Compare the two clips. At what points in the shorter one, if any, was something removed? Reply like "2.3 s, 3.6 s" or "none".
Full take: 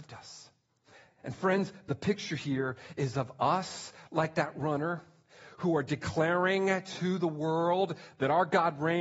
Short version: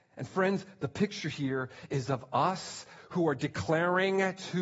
3.0 s